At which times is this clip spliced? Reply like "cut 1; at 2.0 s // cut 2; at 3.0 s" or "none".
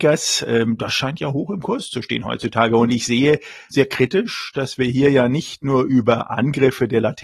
cut 1; at 3.7 s